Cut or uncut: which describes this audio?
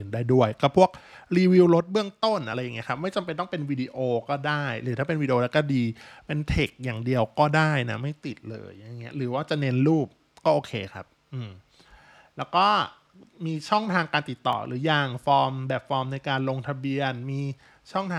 uncut